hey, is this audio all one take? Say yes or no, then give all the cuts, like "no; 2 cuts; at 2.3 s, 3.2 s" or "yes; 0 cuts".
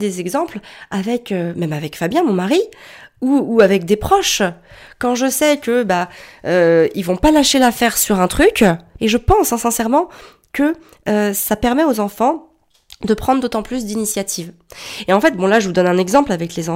no; 1 cut; at 9.0 s